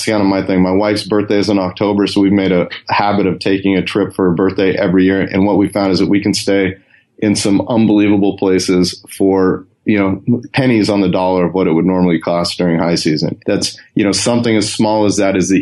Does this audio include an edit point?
yes; 1 cut; at 13.4 s

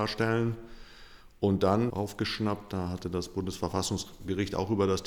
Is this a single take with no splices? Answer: no; 1 cut; at 1.9 s

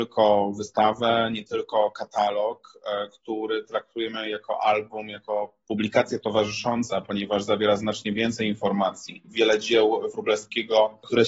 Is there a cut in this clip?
yes; 1 cut; at 9.2 s

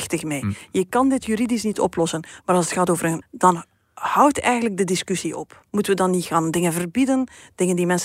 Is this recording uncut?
no; 2 cuts; at 3.2 s, 5.7 s

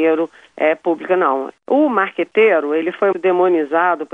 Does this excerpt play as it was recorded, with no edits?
no; 2 cuts; at 1.5 s, 3.1 s

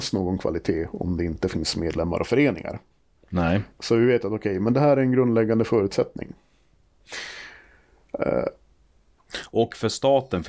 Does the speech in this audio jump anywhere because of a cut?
no; 0 cuts

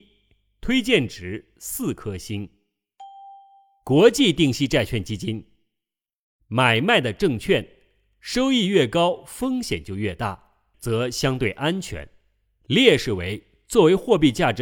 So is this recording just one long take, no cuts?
no; 1 cut; at 10.7 s

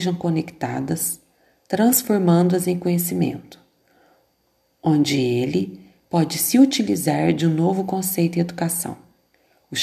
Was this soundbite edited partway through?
no; 0 cuts

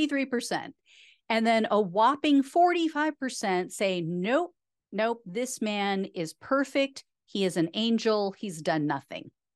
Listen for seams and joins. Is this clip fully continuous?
yes; 0 cuts

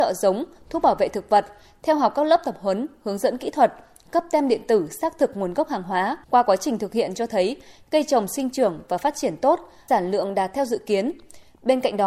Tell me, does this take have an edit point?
yes; 2 cuts; at 6.2 s, 9.9 s

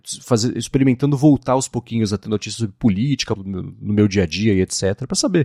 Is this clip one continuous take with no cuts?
no; 1 cut; at 3.4 s

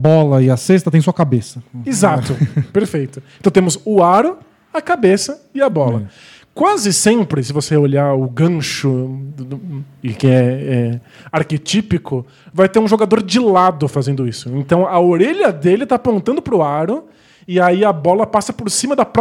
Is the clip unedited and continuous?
yes; 0 cuts

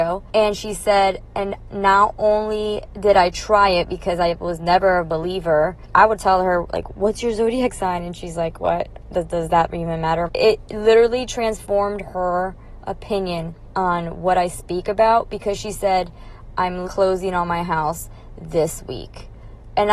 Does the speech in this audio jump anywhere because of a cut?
yes; 2 cuts; at 10.3 s, 16.8 s

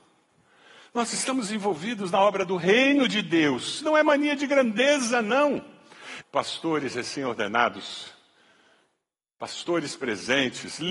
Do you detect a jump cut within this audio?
yes; 1 cut; at 6.2 s

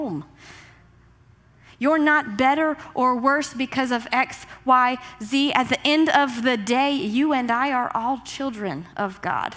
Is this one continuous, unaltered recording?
yes; 0 cuts

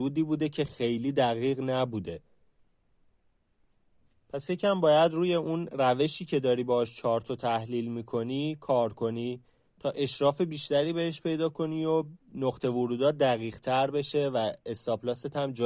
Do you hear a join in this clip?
no; 0 cuts

